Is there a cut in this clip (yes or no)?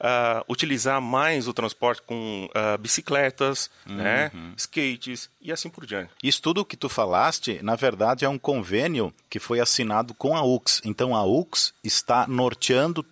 yes